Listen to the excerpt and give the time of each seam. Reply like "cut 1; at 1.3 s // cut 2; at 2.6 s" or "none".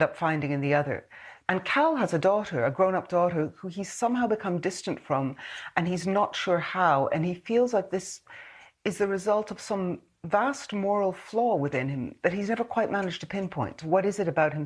cut 1; at 1.5 s